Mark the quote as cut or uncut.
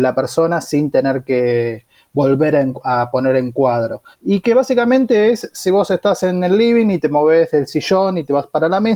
cut